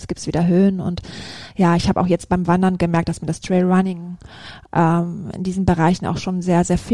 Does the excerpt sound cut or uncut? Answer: uncut